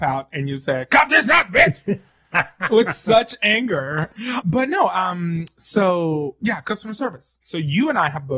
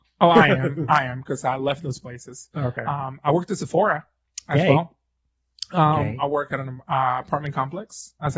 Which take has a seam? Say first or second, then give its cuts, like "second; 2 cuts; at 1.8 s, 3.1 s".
first; 1 cut; at 4.4 s